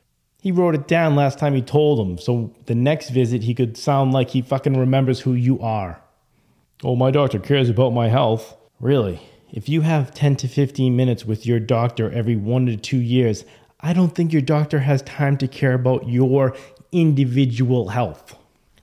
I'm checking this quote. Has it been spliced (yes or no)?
no